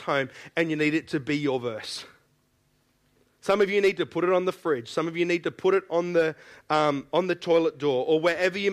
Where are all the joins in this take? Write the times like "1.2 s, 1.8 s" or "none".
none